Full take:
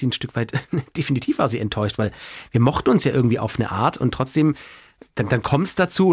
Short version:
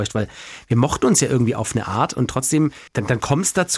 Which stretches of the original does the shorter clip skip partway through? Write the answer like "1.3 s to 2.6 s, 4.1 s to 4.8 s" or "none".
4.7 s to 5.1 s